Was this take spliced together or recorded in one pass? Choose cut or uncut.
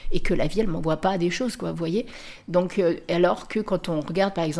uncut